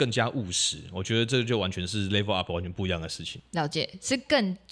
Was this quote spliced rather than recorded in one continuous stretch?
no; 0 cuts

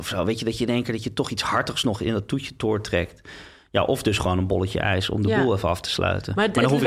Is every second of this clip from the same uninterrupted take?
yes; 0 cuts

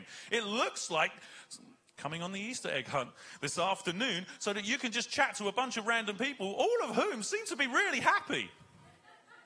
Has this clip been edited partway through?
no; 0 cuts

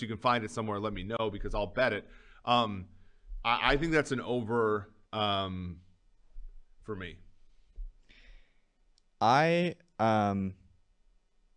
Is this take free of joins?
no; 1 cut; at 5.0 s

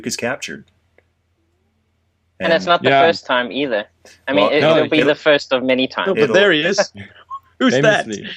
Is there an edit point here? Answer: no; 0 cuts

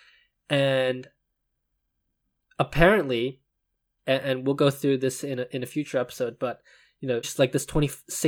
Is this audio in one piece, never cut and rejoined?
no; 2 cuts; at 4.0 s, 7.2 s

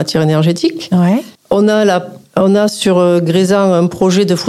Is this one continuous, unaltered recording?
yes; 0 cuts

